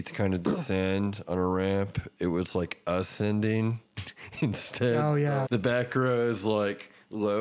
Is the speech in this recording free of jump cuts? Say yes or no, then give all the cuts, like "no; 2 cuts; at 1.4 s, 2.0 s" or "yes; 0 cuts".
no; 1 cut; at 5.5 s